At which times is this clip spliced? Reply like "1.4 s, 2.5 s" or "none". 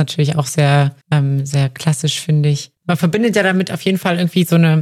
1.0 s, 2.8 s